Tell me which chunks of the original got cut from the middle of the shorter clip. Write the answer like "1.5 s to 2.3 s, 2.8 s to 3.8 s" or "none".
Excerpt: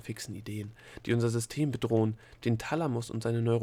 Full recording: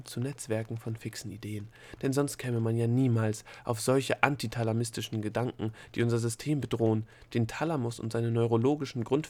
2.0 s to 5.9 s